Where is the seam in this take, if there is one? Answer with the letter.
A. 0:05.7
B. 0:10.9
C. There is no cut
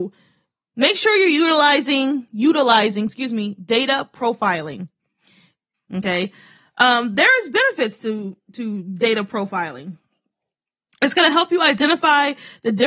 A